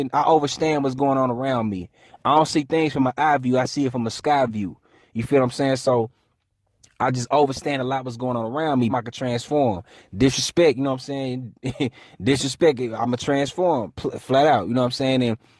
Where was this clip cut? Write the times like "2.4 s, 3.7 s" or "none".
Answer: 8.9 s